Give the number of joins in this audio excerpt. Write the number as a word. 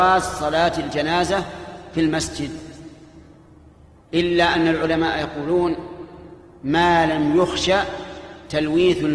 zero